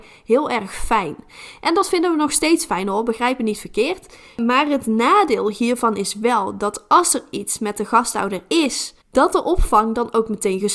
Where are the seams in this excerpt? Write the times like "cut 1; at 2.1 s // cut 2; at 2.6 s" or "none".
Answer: cut 1; at 9.0 s